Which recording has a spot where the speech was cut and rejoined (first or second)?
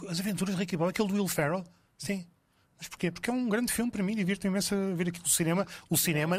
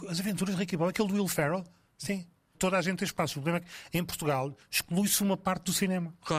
second